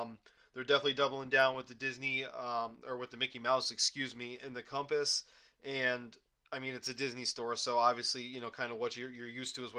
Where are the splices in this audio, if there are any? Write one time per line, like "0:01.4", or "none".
none